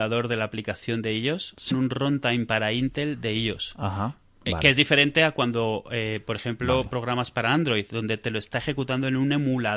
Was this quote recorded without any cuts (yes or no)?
no